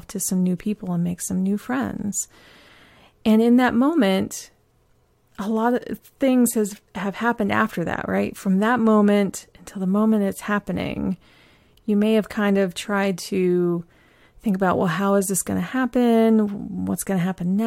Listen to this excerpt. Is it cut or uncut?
uncut